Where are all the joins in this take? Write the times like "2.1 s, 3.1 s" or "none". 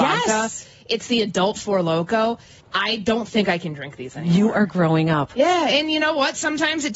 2.6 s

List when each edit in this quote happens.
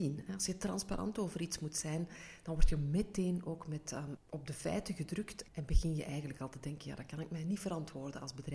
4.2 s, 5.5 s

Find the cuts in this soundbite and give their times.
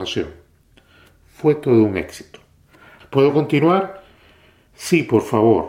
3.0 s

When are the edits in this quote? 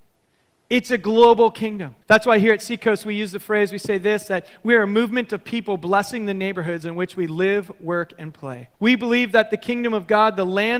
2.0 s, 8.7 s

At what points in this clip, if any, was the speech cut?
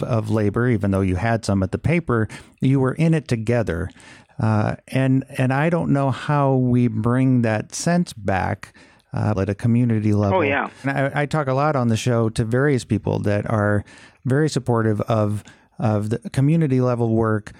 9.3 s, 10.8 s

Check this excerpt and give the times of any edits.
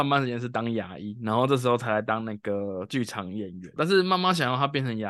3.8 s

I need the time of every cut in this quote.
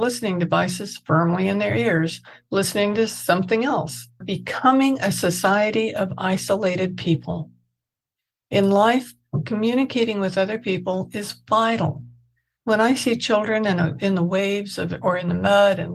4.2 s

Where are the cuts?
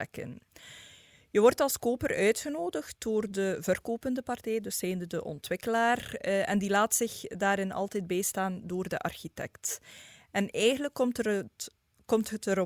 none

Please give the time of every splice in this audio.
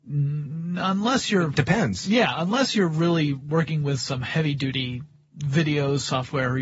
none

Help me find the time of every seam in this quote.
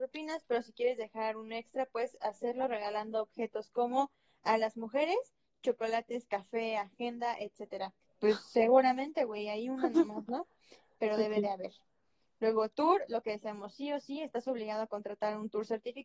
8.0 s

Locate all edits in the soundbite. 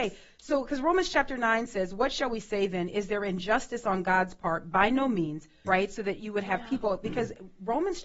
5.6 s

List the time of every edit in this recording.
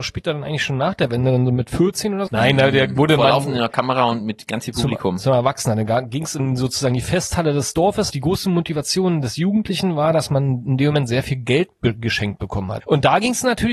2.3 s, 8.1 s, 12.8 s

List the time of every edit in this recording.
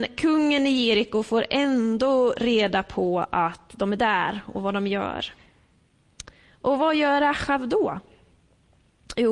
none

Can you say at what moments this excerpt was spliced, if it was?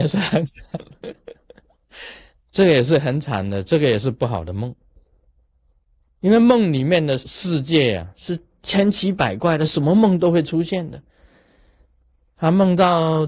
7.2 s

